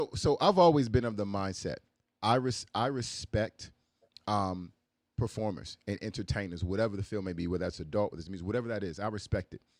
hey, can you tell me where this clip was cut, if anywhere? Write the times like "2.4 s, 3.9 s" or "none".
none